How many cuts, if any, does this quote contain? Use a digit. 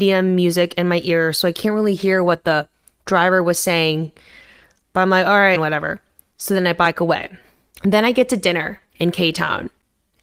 1